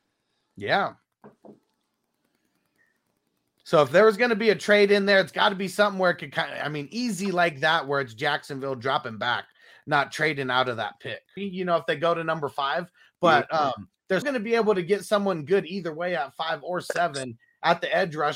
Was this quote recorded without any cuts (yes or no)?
no